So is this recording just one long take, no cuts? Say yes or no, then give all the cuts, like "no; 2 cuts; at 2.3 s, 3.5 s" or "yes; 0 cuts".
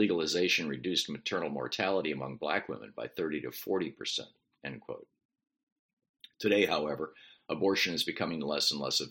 yes; 0 cuts